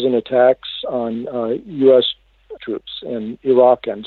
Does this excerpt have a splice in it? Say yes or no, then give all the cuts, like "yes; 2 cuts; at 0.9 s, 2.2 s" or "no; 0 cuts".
yes; 1 cut; at 2.6 s